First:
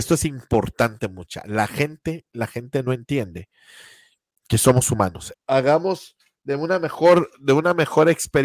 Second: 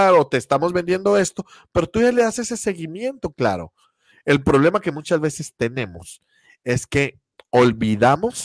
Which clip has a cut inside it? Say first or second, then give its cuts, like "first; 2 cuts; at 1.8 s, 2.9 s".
first; 1 cut; at 5.3 s